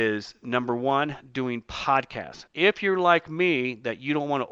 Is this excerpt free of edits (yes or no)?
no